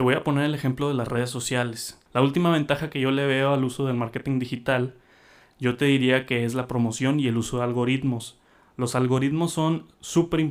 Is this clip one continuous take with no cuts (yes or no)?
no